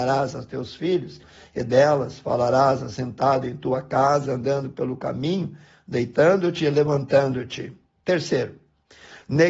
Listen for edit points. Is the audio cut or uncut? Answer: uncut